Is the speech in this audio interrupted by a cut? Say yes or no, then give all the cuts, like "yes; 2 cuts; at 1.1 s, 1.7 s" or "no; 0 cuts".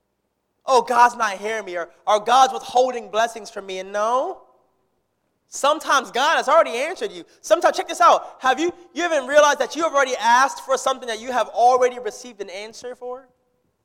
no; 0 cuts